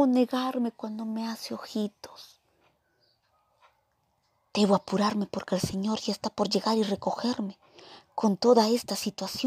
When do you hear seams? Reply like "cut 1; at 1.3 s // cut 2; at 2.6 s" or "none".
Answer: none